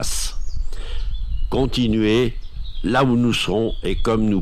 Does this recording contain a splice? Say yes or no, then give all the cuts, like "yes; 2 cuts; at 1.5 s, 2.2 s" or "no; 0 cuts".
no; 0 cuts